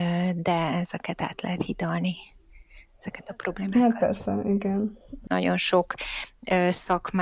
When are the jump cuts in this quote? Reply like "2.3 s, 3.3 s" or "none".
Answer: 5.3 s